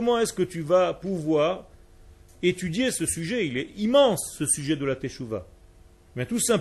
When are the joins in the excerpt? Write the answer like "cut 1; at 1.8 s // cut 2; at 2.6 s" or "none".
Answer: none